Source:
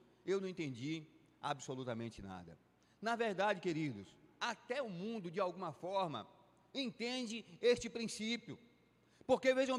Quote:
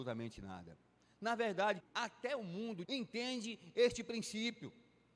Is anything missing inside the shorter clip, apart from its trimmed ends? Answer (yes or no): yes